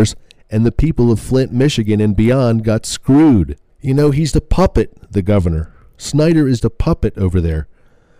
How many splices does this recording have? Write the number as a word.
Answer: two